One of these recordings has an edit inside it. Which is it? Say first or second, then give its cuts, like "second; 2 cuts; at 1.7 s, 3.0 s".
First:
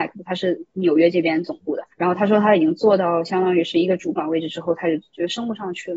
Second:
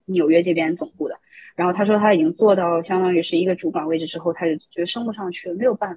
first; 1 cut; at 1.9 s